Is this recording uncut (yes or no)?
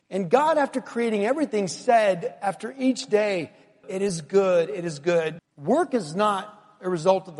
no